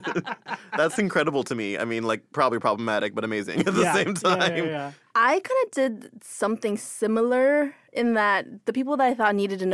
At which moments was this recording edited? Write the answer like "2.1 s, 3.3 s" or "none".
none